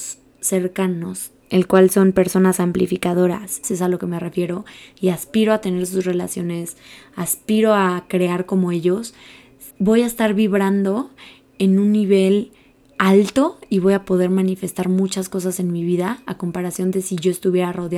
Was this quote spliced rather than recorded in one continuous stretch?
yes; 2 cuts; at 3.6 s, 9.7 s

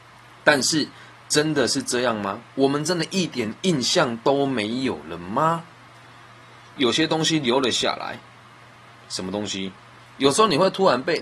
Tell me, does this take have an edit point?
yes; 1 cut; at 10.1 s

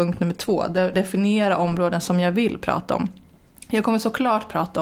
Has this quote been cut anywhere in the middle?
yes; 1 cut; at 0.9 s

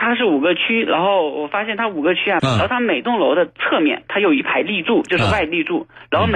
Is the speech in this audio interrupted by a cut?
yes; 1 cut; at 2.4 s

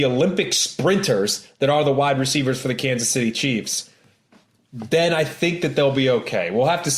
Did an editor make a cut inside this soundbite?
no; 0 cuts

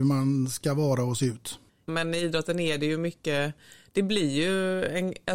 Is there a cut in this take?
yes; 1 cut; at 1.9 s

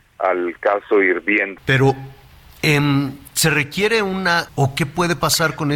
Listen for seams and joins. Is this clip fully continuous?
no; 2 cuts; at 1.6 s, 4.5 s

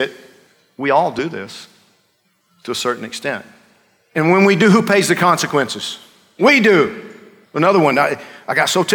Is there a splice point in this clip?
no; 0 cuts

